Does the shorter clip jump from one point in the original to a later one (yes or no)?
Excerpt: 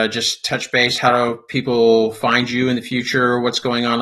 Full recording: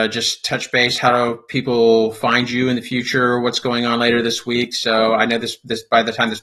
no